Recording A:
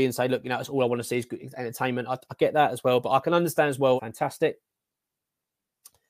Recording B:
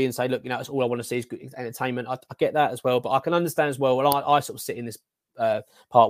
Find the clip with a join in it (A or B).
A